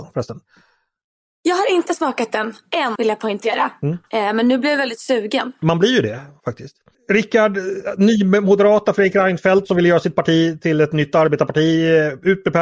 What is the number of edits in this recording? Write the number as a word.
one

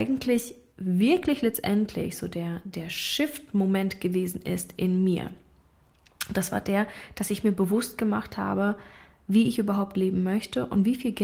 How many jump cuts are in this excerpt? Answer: zero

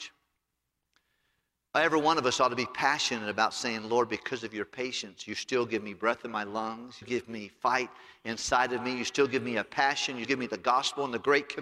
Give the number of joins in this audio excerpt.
two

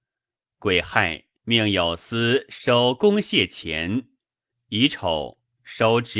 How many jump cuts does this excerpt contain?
two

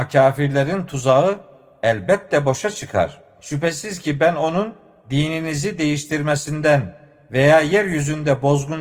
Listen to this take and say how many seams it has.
one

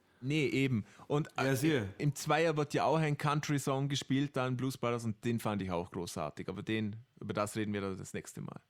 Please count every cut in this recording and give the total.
one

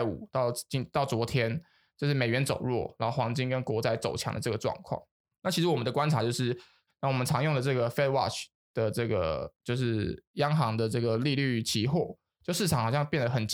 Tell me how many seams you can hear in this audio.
two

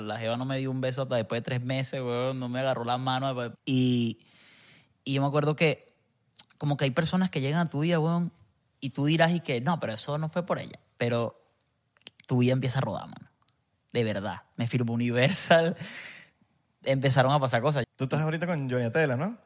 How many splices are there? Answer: two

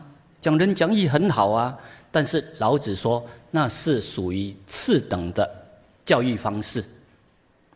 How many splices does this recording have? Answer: zero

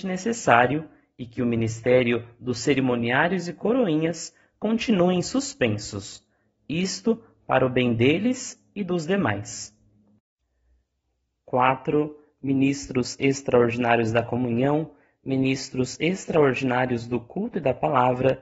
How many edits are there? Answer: zero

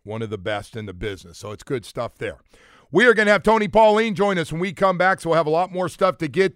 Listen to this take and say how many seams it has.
zero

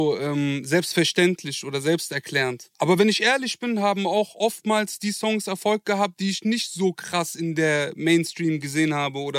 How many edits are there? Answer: one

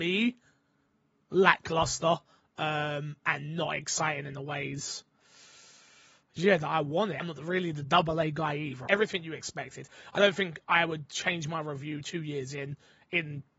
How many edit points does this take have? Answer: two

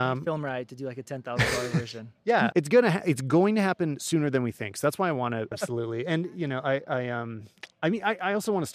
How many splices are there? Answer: two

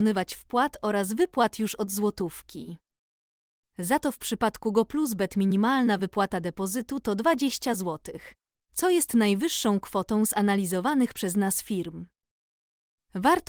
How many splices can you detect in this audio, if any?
zero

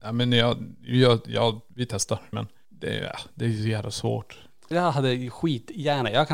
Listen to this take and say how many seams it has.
two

